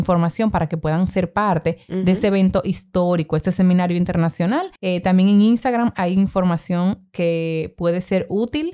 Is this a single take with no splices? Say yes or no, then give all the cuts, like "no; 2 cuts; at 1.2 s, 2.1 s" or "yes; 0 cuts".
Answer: no; 1 cut; at 4.8 s